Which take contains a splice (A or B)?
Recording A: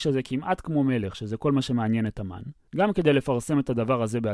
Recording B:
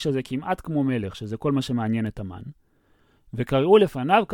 A